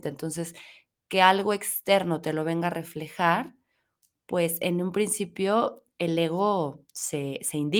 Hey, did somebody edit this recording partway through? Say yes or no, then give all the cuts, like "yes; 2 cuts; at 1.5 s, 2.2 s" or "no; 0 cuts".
no; 0 cuts